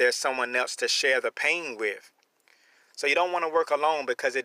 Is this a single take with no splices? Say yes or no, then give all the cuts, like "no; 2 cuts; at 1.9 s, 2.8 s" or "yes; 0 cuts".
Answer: yes; 0 cuts